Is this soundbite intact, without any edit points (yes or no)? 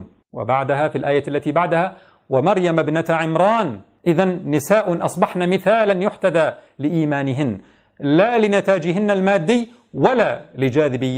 yes